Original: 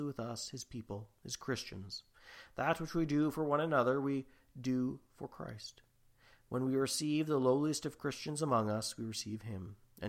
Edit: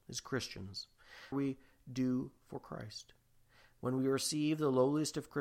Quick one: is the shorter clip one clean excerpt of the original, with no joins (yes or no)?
no